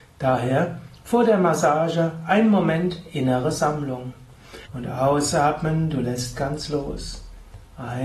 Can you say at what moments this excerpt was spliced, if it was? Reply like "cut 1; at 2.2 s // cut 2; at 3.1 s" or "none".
cut 1; at 4.7 s

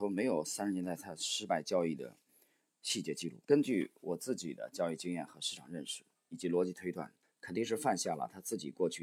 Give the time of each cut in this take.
cut 1; at 3.4 s // cut 2; at 7.2 s

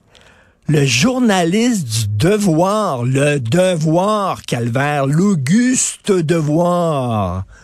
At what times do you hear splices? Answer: none

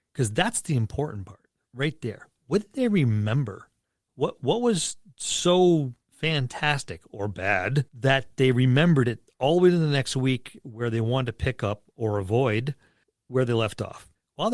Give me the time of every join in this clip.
cut 1; at 6.0 s // cut 2; at 7.9 s

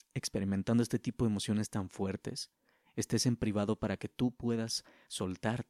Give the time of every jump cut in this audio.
none

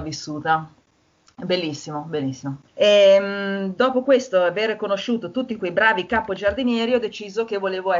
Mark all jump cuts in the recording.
cut 1; at 2.7 s

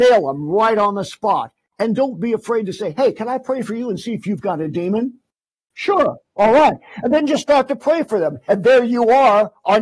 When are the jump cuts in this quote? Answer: cut 1; at 8.5 s

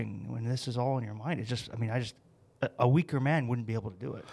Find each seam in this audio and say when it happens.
none

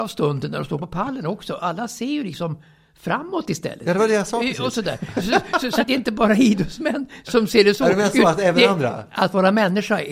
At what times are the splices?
cut 1; at 5.8 s

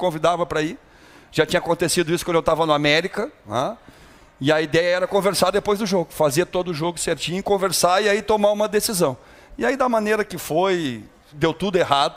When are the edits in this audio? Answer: none

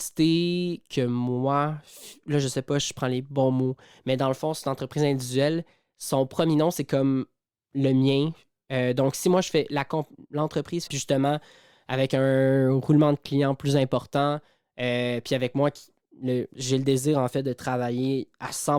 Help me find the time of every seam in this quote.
cut 1; at 10.9 s

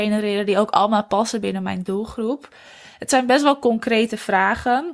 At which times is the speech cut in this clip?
none

